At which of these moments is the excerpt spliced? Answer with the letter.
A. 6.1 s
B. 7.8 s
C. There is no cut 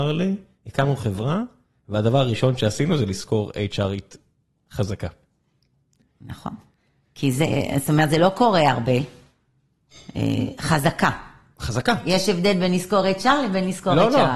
C